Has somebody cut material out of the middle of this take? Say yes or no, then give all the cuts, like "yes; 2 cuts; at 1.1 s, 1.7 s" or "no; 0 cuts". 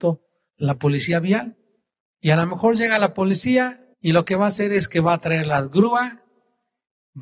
yes; 2 cuts; at 2.2 s, 3.9 s